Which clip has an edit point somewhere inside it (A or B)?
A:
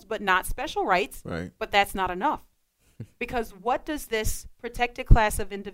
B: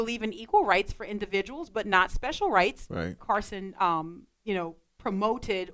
B